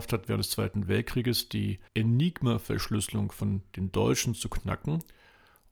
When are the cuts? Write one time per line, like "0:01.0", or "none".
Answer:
0:01.9